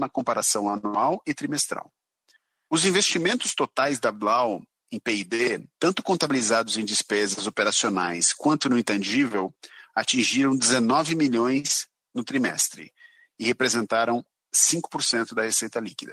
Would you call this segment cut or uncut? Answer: uncut